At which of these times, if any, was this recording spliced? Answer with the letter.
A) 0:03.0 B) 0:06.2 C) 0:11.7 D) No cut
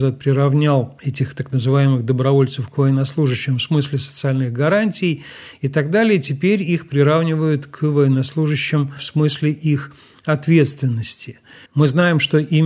C